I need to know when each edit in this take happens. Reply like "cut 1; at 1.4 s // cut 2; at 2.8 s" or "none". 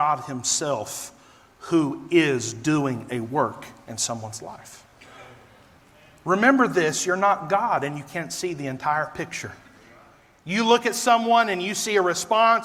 none